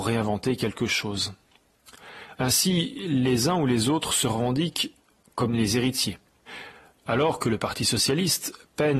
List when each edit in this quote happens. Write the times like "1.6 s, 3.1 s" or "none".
2.3 s